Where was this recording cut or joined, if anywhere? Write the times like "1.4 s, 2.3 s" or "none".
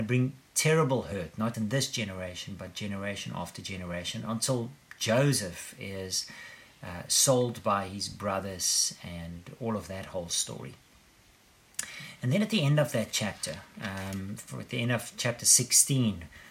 1.5 s